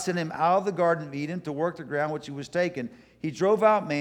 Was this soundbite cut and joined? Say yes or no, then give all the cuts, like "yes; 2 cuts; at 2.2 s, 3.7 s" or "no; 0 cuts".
no; 0 cuts